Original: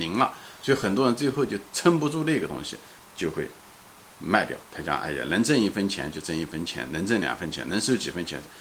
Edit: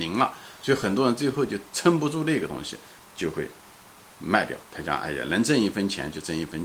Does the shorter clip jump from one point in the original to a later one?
no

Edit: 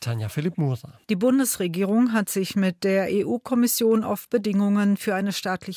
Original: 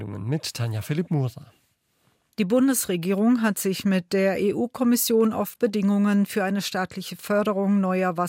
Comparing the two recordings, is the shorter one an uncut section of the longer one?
no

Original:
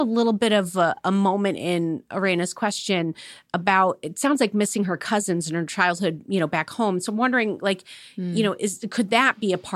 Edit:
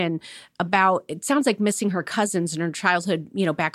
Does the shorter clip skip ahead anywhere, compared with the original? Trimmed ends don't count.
no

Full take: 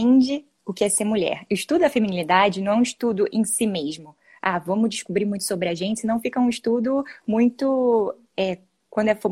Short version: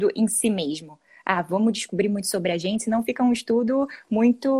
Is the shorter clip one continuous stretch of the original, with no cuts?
yes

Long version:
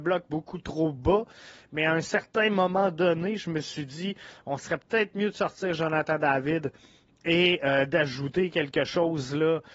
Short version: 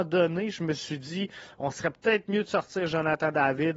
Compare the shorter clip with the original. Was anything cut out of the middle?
no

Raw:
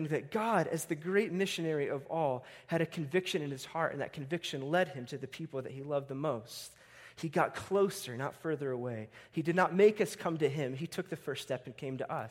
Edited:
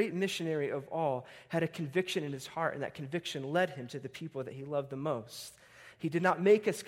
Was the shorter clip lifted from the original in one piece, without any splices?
no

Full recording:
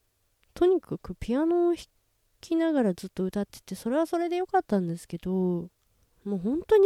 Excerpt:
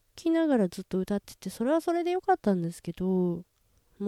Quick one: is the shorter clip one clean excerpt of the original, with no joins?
yes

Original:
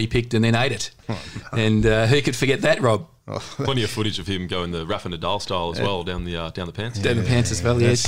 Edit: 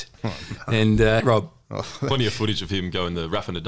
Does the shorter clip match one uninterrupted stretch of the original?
no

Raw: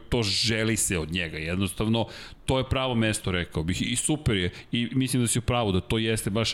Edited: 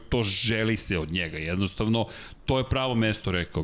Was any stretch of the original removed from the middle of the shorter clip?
no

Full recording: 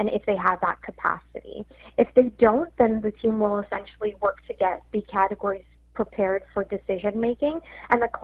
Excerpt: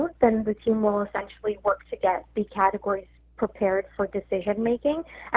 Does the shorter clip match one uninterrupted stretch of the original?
yes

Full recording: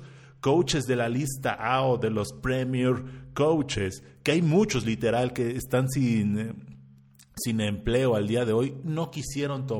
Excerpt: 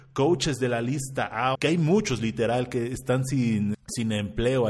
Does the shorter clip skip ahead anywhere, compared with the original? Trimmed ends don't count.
yes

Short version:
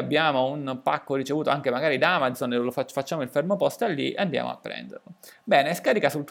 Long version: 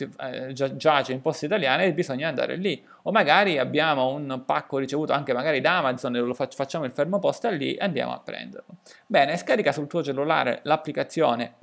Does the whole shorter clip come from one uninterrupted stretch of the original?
yes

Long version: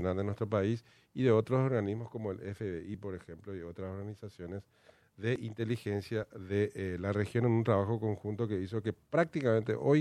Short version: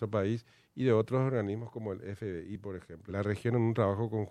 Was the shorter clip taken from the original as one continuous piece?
no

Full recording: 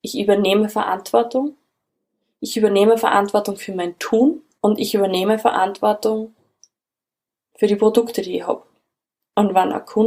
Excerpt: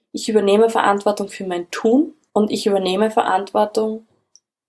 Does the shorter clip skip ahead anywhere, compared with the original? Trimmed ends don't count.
no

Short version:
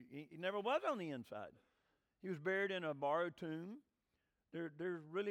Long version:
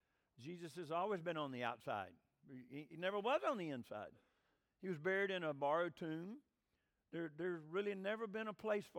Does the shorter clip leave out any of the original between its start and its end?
no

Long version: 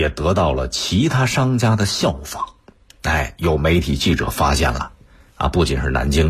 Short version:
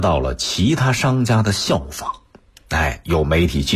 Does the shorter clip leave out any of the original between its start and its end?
no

